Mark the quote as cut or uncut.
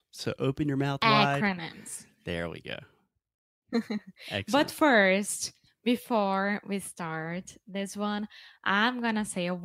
uncut